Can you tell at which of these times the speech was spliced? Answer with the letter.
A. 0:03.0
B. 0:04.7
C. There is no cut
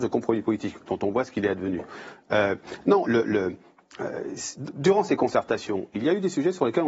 A